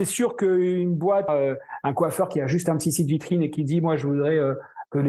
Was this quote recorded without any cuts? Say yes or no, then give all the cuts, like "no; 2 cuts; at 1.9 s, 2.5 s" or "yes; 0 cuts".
no; 1 cut; at 1.3 s